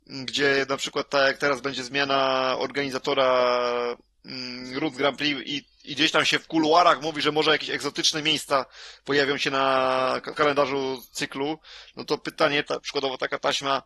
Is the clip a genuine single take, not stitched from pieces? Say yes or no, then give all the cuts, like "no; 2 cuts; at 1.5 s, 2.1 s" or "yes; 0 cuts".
no; 2 cuts; at 10.3 s, 12.6 s